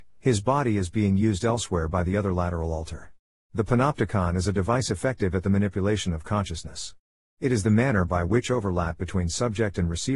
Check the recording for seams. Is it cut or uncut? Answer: uncut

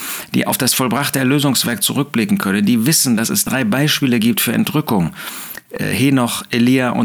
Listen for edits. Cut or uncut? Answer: uncut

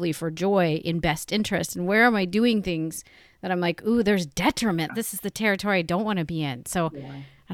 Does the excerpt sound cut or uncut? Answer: cut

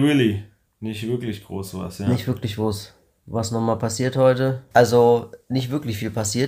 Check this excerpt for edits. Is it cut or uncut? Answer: cut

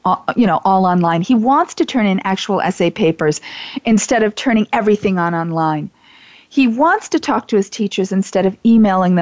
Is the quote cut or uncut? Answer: uncut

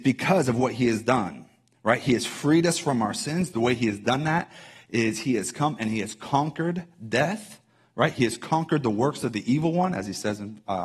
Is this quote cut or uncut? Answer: uncut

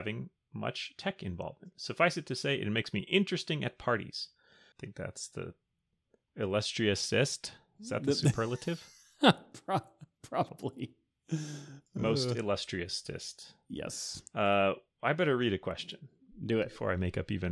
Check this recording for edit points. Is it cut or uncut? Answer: cut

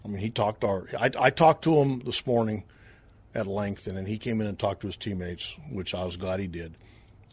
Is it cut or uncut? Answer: uncut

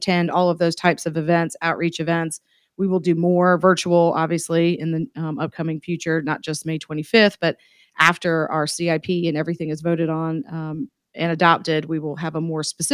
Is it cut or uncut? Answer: uncut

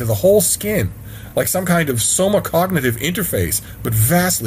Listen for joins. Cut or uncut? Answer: uncut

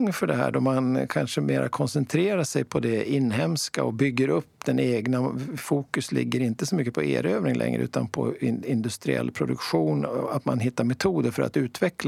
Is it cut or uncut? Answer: uncut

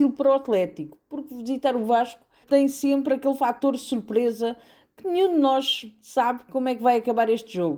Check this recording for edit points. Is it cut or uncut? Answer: cut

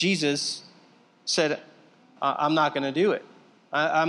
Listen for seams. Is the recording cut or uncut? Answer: cut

